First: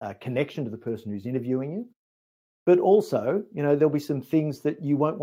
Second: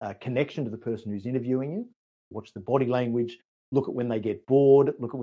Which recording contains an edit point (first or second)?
second